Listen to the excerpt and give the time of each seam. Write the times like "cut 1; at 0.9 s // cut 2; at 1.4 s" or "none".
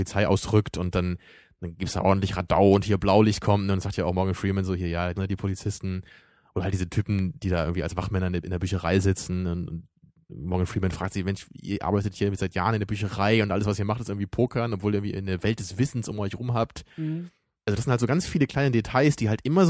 cut 1; at 5.1 s